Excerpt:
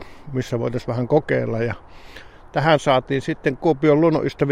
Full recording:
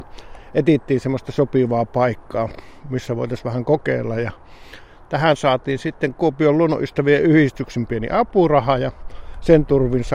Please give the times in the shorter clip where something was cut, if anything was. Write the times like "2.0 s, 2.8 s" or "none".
none